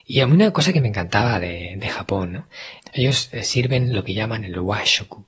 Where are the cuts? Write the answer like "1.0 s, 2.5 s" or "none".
2.8 s